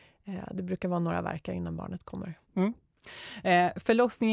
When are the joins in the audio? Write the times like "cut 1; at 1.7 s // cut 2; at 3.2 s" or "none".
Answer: cut 1; at 2.4 s